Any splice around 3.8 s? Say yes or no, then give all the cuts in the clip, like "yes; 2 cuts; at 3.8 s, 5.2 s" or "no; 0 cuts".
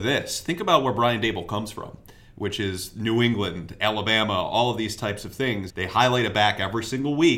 no; 1 cut; at 5.7 s